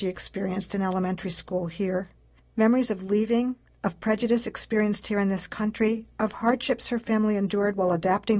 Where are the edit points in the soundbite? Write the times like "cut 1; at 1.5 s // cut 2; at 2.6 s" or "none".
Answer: none